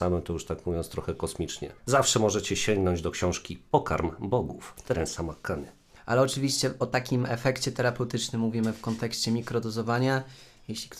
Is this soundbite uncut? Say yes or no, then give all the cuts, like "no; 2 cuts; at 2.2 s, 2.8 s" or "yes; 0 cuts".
no; 2 cuts; at 1.8 s, 6.0 s